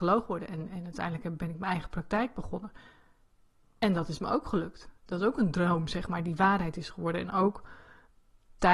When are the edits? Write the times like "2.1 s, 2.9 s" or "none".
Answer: none